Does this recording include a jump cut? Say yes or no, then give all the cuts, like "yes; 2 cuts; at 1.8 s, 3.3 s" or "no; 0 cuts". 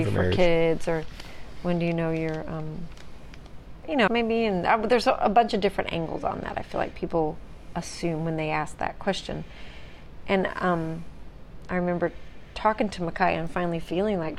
yes; 1 cut; at 4.1 s